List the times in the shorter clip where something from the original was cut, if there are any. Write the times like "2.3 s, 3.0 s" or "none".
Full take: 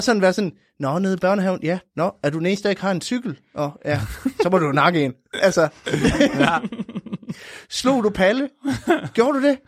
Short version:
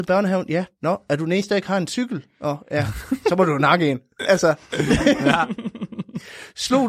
none

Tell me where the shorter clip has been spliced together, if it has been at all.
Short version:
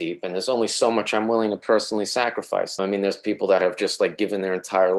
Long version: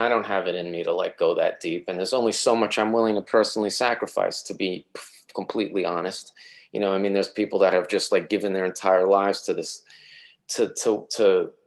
2.8 s

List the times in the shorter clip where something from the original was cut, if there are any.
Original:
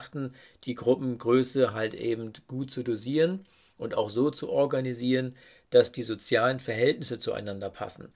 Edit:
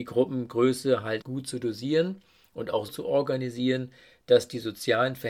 1.2 s, 2.9 s

